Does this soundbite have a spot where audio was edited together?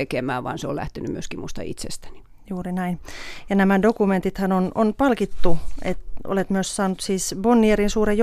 no; 0 cuts

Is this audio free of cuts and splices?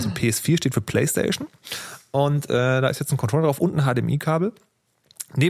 yes; 0 cuts

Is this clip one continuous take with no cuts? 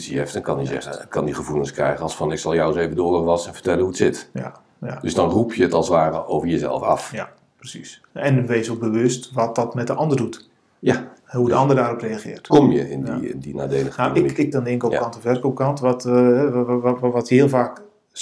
no; 3 cuts; at 8.1 s, 12.5 s, 14.5 s

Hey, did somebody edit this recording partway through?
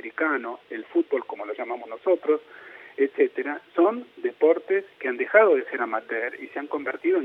no; 0 cuts

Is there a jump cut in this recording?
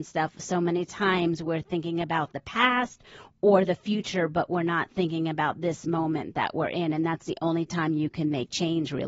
no; 0 cuts

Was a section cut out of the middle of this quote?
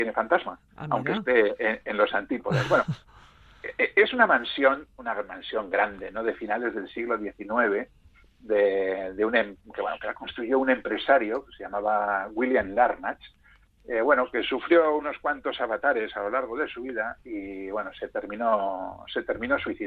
no; 0 cuts

